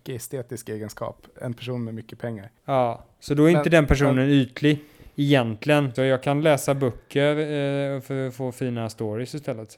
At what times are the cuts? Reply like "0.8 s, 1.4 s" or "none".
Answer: 5.9 s